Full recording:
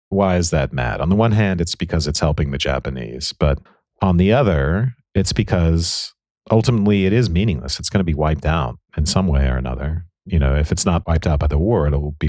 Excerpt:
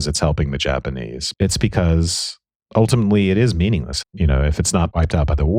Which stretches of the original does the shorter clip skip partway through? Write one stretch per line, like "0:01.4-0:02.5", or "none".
0:03.3-0:05.1
0:07.8-0:10.2